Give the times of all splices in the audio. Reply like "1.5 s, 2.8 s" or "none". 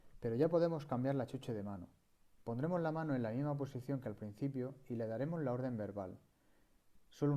none